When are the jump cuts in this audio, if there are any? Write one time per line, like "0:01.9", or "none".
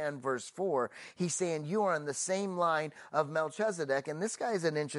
none